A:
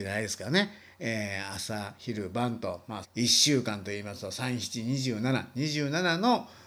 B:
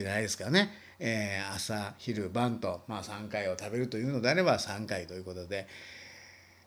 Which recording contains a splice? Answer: A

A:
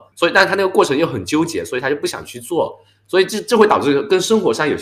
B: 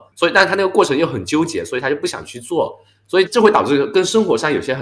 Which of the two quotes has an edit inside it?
B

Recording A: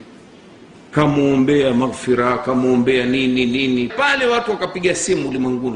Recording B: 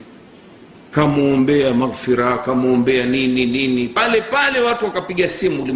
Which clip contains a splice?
A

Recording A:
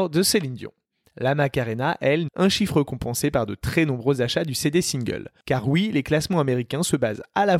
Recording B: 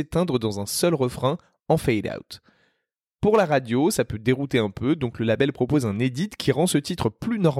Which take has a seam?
A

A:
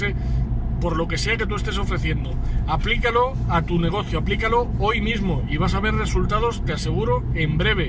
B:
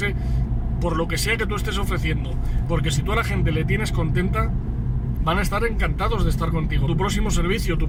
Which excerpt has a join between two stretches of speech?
B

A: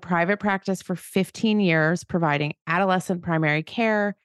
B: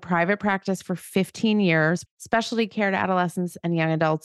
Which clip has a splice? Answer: B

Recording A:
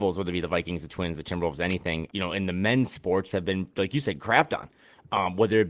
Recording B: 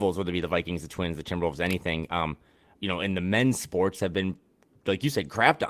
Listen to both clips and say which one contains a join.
A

